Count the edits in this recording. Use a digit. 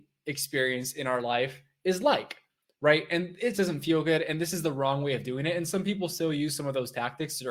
1